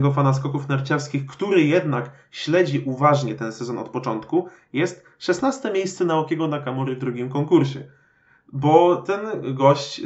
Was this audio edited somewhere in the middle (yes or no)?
no